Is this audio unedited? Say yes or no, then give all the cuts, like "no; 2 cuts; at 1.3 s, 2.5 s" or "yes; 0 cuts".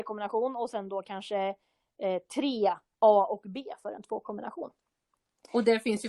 yes; 0 cuts